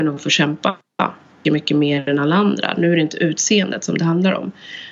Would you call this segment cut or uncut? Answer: cut